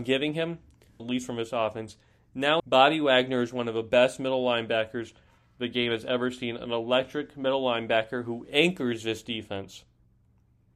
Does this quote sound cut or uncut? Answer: cut